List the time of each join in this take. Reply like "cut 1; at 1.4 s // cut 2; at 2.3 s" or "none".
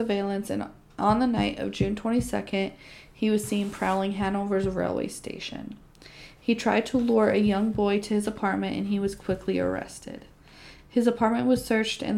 none

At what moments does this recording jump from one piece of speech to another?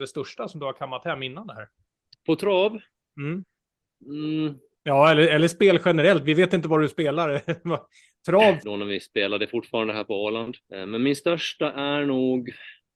cut 1; at 8.6 s // cut 2; at 10.6 s

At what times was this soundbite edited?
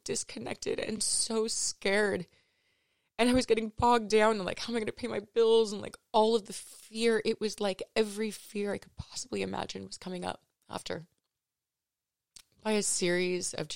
none

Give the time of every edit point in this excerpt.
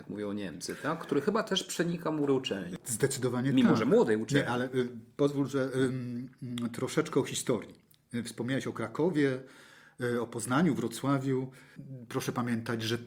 none

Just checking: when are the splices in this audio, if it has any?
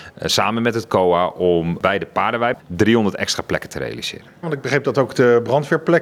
cut 1; at 2.6 s // cut 2; at 4.4 s

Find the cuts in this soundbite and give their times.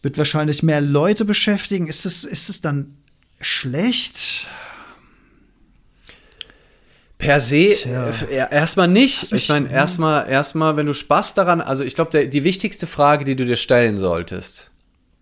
cut 1; at 9.3 s

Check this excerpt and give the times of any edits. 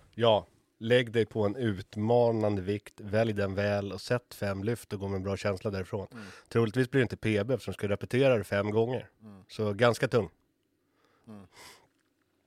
cut 1; at 11.2 s

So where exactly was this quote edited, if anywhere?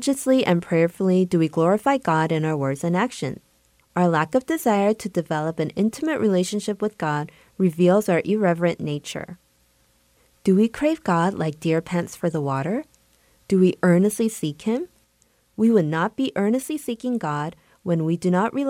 cut 1; at 3.8 s

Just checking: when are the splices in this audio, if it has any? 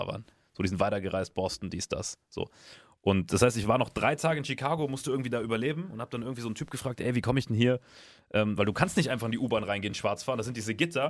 none

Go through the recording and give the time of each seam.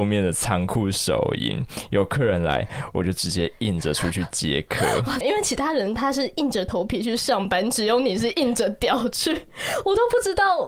cut 1; at 5.2 s

